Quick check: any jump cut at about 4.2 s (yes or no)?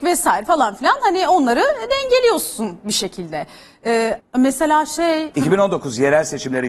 yes